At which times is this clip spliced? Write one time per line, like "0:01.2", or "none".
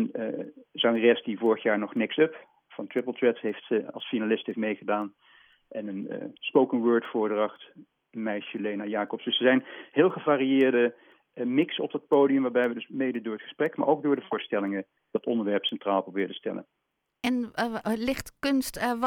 none